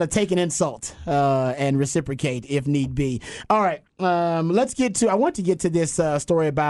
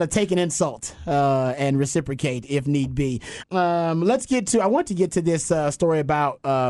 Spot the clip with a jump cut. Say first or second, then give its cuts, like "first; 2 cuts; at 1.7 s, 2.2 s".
second; 1 cut; at 3.4 s